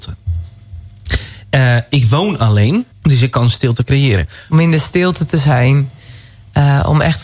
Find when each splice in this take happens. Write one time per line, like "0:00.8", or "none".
0:02.9
0:04.5